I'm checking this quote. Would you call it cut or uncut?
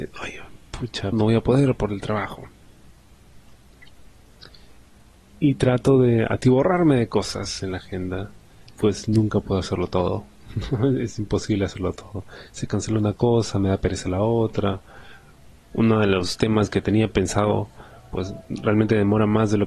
cut